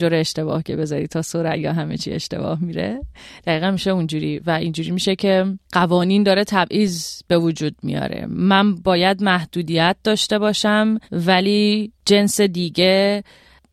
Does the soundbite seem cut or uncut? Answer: cut